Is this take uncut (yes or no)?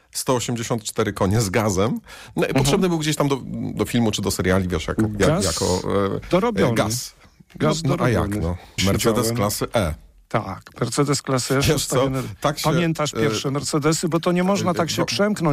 no